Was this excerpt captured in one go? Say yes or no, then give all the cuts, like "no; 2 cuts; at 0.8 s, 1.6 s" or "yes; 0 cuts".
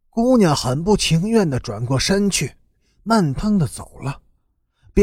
no; 1 cut; at 3.4 s